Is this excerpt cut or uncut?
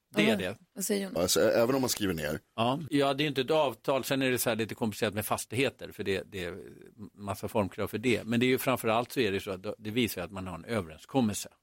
cut